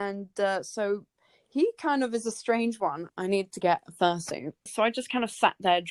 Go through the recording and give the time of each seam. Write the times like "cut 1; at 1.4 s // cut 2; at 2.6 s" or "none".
cut 1; at 3.1 s // cut 2; at 4.7 s